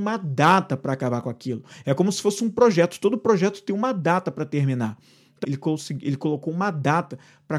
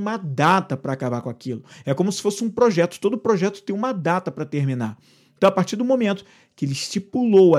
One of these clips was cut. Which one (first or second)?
first